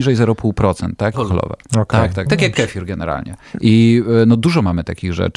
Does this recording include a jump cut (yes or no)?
yes